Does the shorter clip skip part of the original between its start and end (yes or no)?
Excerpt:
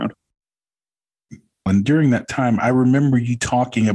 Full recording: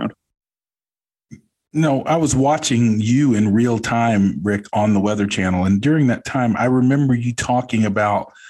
yes